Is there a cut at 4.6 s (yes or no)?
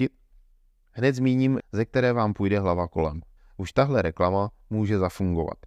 no